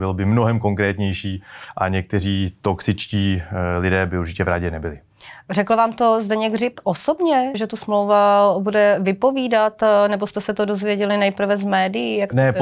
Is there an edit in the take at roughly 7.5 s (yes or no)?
yes